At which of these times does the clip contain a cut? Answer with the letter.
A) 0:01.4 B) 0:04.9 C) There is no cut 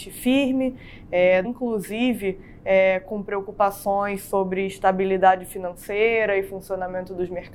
A